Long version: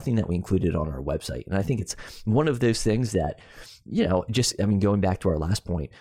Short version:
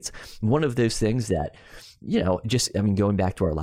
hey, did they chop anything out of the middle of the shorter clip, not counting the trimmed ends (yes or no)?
no